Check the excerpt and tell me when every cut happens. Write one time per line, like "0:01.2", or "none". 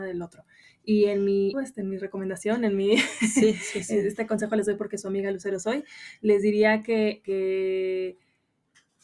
0:01.5